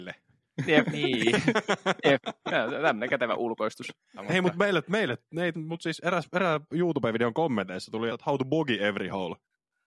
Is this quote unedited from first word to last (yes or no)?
no